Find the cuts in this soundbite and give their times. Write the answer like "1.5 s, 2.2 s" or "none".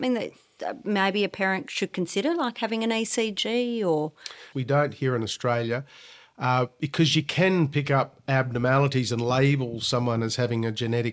4.5 s